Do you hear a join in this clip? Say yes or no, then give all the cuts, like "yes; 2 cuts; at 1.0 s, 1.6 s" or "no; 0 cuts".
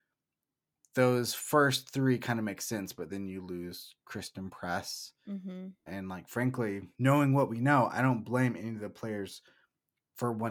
yes; 2 cuts; at 5.9 s, 6.9 s